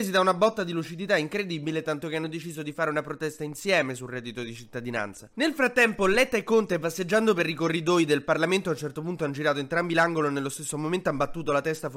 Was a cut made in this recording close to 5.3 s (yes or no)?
yes